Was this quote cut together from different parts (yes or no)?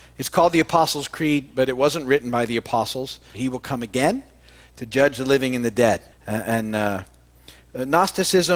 yes